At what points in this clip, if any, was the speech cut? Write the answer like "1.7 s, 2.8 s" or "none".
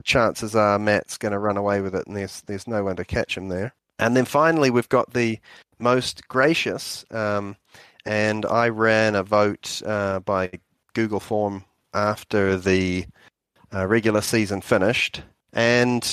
none

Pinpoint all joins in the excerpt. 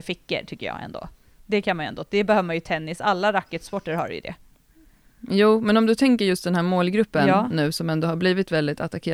none

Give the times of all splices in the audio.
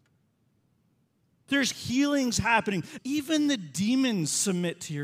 1.5 s, 3.0 s

